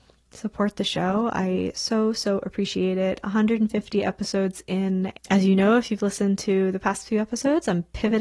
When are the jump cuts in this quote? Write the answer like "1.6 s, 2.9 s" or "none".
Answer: 5.2 s